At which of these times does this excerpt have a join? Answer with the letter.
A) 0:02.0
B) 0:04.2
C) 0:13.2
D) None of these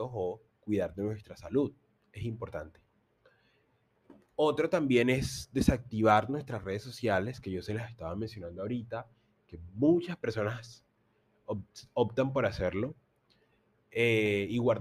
D